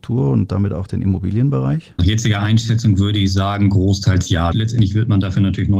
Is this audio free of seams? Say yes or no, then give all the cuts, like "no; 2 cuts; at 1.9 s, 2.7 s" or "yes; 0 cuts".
no; 2 cuts; at 2.0 s, 4.5 s